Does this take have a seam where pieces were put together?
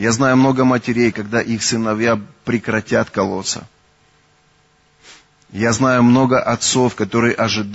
yes; 1 cut; at 1.1 s

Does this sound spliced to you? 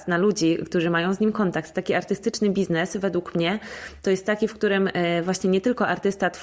no; 0 cuts

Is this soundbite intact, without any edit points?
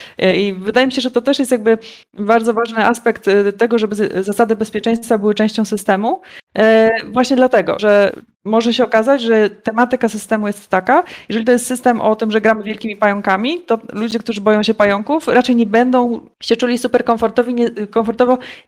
no; 2 cuts; at 7.8 s, 16.3 s

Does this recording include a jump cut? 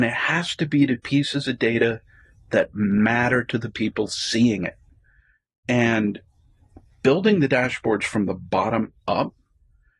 no; 0 cuts

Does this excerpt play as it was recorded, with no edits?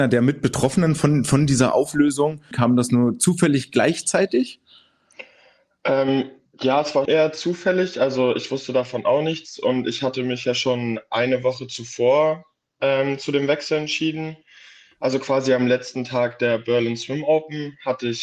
no; 2 cuts; at 2.5 s, 7.1 s

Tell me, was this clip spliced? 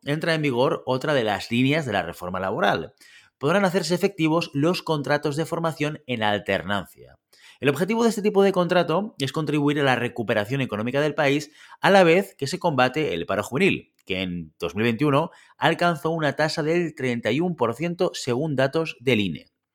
no; 0 cuts

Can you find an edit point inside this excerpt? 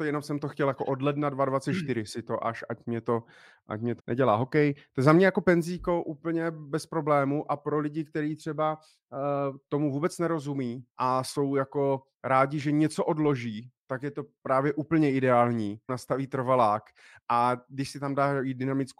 yes; 3 cuts; at 4.0 s, 10.9 s, 15.9 s

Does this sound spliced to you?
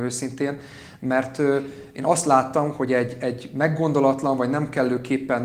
no; 0 cuts

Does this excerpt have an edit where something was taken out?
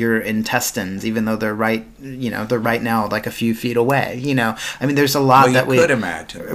no; 0 cuts

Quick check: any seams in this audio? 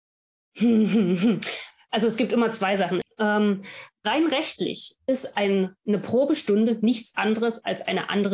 yes; 1 cut; at 3.0 s

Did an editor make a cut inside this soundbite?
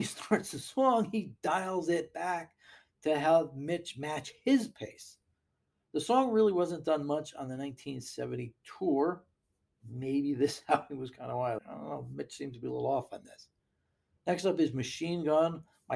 yes; 1 cut; at 11.6 s

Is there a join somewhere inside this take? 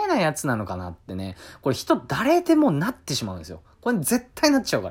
no; 0 cuts

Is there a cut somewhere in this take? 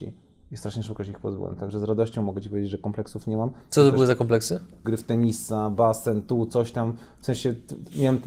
yes; 1 cut; at 4.8 s

